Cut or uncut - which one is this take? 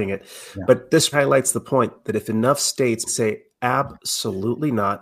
cut